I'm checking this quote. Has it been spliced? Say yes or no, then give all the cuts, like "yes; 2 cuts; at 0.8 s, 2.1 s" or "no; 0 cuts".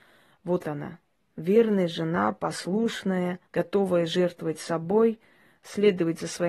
yes; 1 cut; at 3.5 s